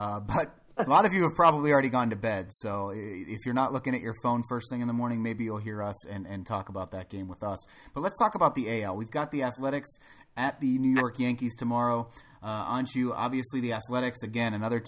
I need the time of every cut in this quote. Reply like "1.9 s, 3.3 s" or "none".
none